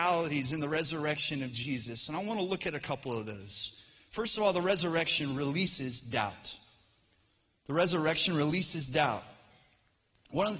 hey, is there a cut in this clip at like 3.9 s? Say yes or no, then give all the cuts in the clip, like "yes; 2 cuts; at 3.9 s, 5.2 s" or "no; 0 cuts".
no; 0 cuts